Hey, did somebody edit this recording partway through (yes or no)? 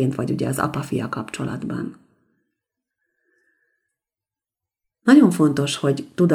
no